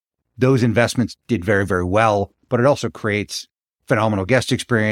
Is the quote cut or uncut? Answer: cut